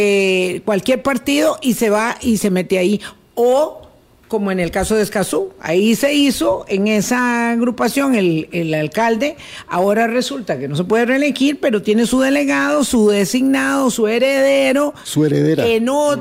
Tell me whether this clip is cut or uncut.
uncut